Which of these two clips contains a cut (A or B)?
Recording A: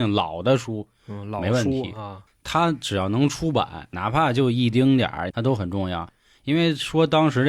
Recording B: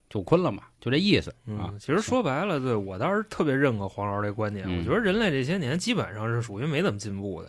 A